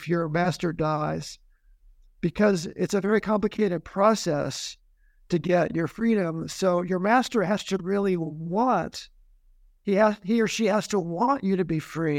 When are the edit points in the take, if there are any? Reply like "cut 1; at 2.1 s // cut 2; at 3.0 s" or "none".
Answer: none